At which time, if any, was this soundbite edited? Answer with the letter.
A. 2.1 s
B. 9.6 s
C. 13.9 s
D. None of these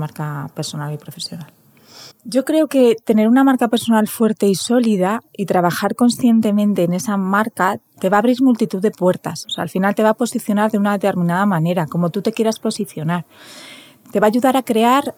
A